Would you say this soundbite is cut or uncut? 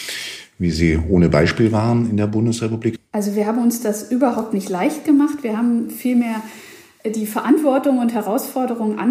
cut